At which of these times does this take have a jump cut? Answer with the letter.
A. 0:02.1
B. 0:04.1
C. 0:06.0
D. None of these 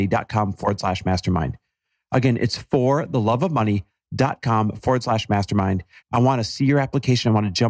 C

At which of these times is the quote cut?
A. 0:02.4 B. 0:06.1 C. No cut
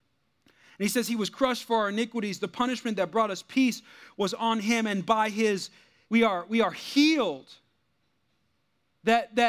B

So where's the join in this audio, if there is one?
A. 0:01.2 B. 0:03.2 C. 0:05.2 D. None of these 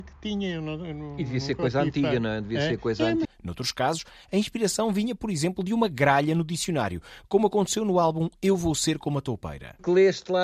B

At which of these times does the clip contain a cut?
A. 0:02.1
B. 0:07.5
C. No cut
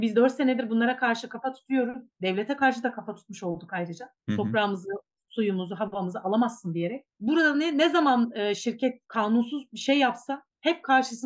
A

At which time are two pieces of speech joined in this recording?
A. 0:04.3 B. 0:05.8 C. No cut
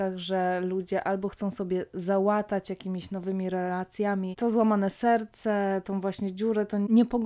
C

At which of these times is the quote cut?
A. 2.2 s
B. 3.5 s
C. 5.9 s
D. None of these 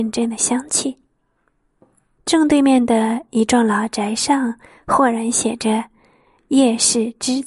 A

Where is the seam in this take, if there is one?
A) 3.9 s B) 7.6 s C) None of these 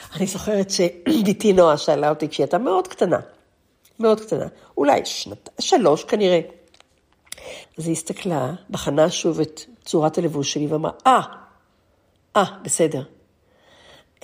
B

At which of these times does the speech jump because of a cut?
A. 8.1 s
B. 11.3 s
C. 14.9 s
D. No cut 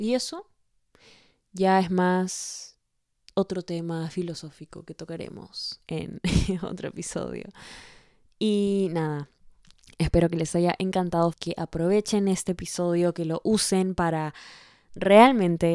B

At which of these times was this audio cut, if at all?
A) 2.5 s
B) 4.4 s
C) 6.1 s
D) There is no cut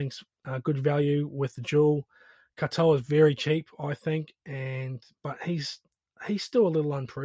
D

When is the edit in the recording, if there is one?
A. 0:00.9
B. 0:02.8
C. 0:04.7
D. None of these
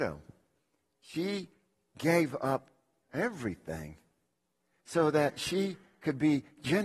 D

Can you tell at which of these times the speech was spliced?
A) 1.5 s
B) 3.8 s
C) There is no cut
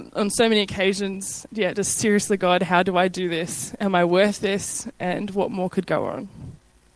A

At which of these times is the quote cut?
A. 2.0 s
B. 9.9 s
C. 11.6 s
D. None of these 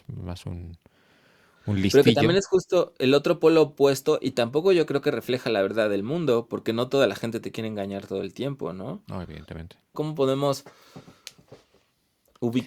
B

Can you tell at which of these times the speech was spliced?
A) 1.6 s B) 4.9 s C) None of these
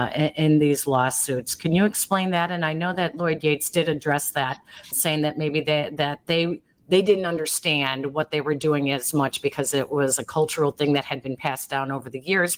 B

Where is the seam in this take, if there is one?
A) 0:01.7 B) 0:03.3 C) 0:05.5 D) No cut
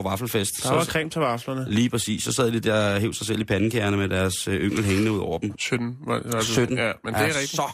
C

